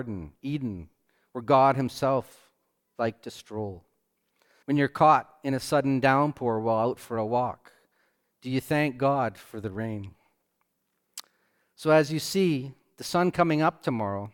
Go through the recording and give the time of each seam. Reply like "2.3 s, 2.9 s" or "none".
4.6 s